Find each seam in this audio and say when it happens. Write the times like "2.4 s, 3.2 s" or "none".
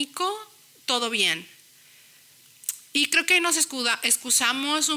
none